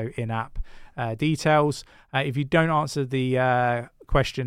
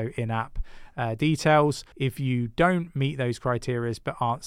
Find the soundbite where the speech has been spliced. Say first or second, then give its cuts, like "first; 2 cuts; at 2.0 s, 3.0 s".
second; 1 cut; at 1.9 s